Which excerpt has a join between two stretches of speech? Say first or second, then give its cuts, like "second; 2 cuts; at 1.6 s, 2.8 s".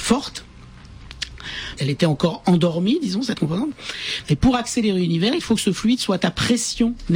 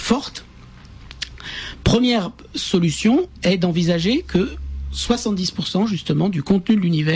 first; 2 cuts; at 1.8 s, 4.2 s